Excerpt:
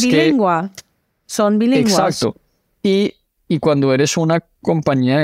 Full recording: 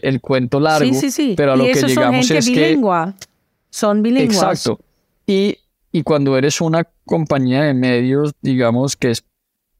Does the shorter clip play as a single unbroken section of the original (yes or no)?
yes